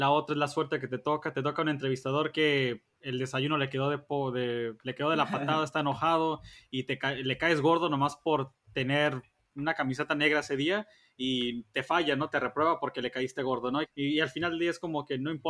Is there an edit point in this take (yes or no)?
yes